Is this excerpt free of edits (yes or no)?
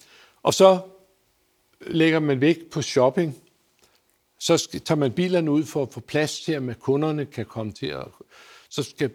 yes